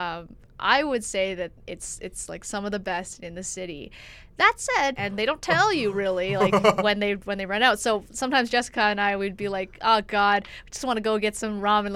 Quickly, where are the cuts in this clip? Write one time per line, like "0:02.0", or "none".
0:05.0